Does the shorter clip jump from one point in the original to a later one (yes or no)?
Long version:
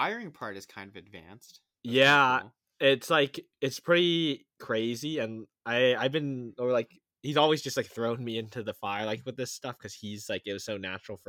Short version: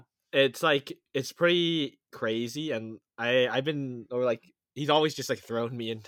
no